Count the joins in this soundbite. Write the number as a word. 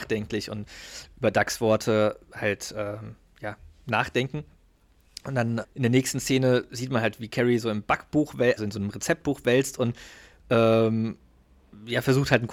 two